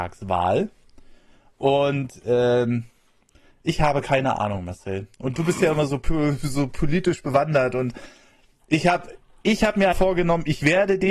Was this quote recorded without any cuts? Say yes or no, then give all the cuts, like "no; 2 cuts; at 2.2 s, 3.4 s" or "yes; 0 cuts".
no; 1 cut; at 9.9 s